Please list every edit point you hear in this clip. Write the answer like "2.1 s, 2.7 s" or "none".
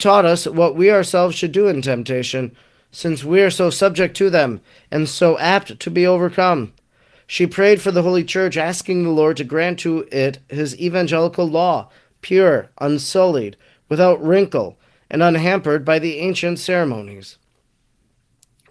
none